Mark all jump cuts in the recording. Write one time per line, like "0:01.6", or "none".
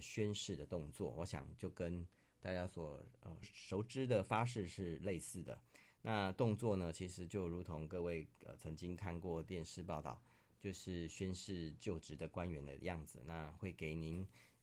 0:03.4